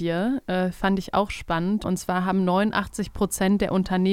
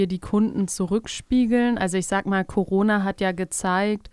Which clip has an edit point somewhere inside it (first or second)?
first